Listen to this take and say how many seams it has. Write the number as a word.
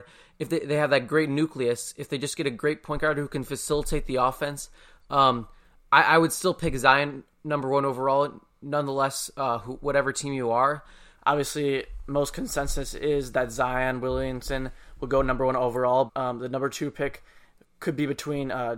two